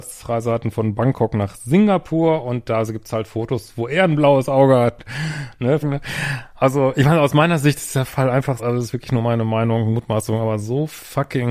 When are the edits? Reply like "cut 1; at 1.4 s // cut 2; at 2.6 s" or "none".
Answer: cut 1; at 5.8 s // cut 2; at 8.6 s